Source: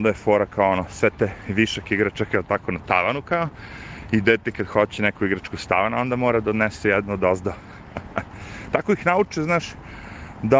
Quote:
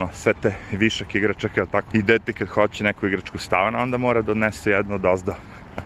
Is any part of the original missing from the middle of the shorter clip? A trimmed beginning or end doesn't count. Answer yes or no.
yes